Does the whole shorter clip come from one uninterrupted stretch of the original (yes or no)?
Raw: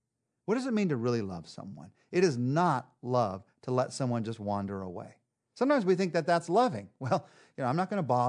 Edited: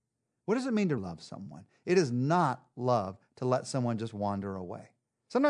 no